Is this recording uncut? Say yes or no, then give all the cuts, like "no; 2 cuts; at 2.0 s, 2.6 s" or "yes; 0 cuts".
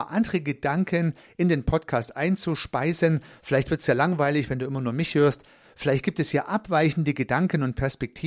yes; 0 cuts